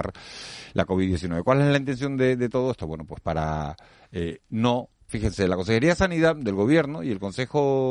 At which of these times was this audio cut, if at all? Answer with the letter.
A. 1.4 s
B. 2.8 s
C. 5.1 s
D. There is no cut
C